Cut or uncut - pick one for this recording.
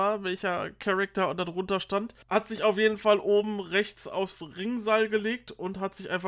cut